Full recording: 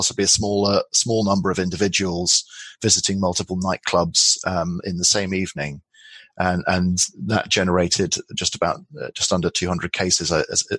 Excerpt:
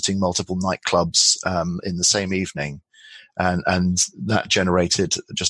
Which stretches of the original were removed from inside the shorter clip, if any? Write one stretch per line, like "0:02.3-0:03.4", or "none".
none